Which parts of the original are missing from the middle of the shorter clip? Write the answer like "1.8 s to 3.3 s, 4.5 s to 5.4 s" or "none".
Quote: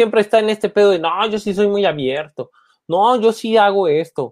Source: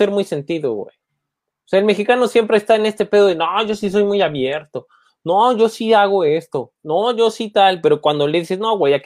none

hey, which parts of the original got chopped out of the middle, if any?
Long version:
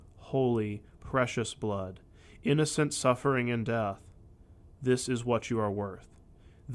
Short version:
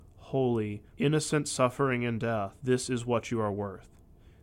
0.9 s to 2.4 s, 4.0 s to 4.8 s

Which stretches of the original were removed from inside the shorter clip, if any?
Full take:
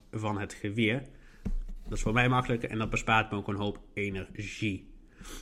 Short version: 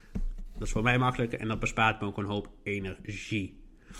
none

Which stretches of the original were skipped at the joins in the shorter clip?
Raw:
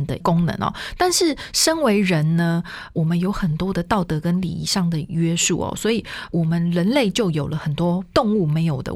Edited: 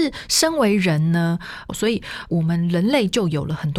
2.9 s to 5.7 s

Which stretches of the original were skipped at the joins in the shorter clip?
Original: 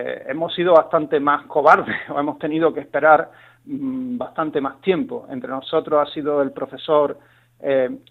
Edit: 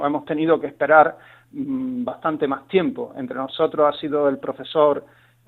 none

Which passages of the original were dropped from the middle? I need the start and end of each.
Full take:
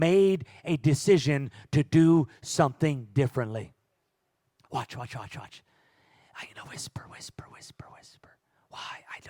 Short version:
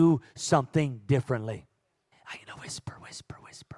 4.2 s to 6.2 s

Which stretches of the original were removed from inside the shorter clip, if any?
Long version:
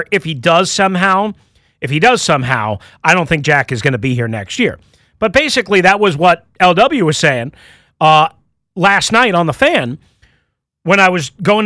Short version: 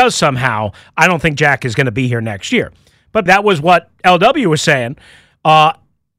5.3 s to 5.8 s

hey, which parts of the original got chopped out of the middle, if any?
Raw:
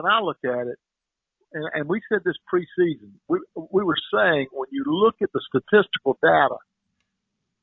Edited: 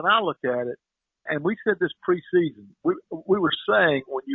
1.3 s to 1.7 s

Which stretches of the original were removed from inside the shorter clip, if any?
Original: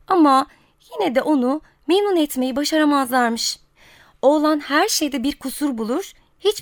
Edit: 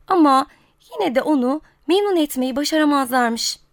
none

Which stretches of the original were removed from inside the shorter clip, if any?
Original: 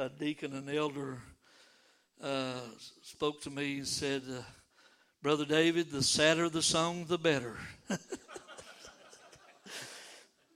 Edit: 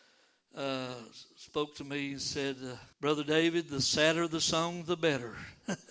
4.6 s to 5.1 s

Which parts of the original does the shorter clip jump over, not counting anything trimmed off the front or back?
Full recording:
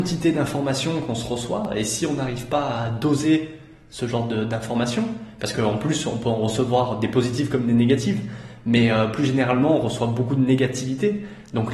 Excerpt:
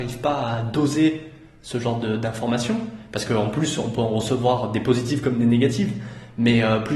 none

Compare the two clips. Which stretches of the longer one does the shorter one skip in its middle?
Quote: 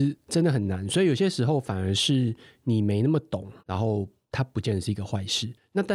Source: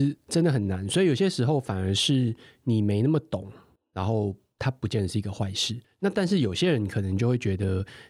3.6 s to 3.9 s

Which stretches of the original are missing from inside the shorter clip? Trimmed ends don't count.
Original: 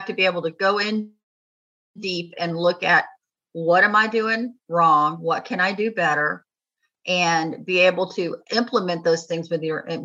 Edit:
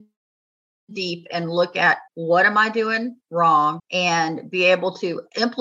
3.1 s to 3.5 s, 5.2 s to 6.9 s

